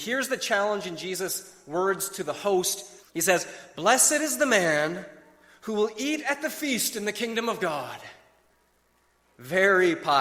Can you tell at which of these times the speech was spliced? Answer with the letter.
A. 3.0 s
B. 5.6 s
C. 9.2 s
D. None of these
A